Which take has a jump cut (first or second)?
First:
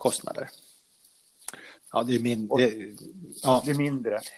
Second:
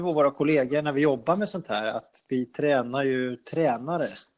first